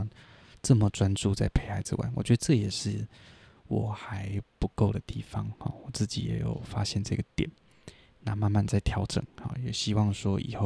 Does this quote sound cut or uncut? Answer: uncut